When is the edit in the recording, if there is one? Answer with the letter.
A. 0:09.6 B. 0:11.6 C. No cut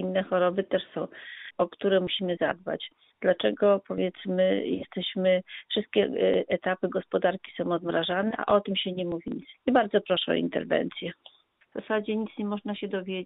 B